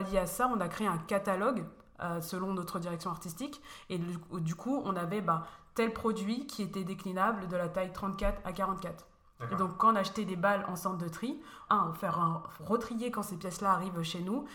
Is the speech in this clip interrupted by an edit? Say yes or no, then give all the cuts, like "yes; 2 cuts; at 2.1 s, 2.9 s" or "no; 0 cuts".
yes; 1 cut; at 11.7 s